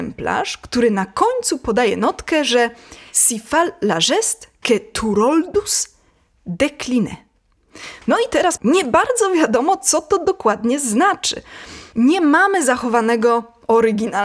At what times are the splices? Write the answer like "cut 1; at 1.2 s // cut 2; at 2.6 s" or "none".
cut 1; at 8.6 s // cut 2; at 11.9 s